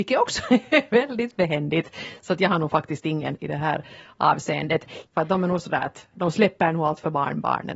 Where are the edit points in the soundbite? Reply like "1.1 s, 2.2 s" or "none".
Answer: 3.4 s, 5.1 s